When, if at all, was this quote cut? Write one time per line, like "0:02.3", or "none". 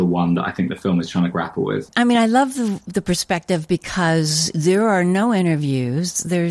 none

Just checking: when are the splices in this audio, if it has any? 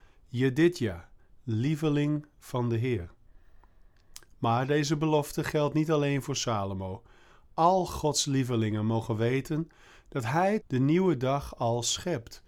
0:10.6

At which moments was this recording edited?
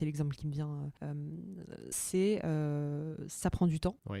0:01.9

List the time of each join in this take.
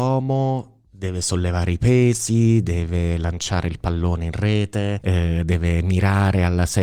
none

